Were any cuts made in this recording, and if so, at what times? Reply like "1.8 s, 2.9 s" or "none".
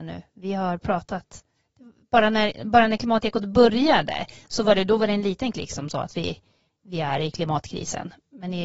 none